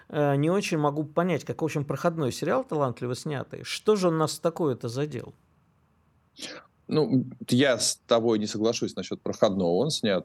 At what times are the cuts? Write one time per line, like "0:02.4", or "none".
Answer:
none